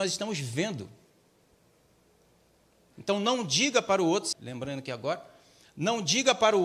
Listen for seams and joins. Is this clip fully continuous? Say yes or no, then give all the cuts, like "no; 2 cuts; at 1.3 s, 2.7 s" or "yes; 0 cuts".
no; 2 cuts; at 2.9 s, 4.3 s